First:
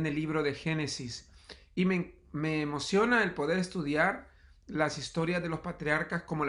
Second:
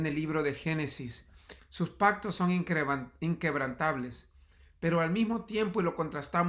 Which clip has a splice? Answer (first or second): second